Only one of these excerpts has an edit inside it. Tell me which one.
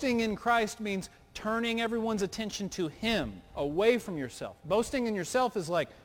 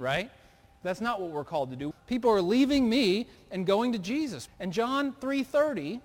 second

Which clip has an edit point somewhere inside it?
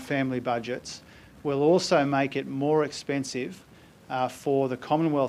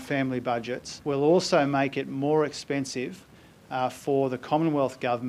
second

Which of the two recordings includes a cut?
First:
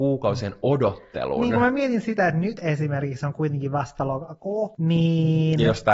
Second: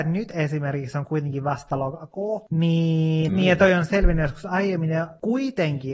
second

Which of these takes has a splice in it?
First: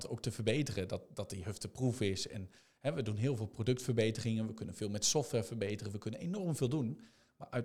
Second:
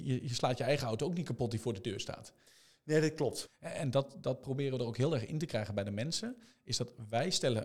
second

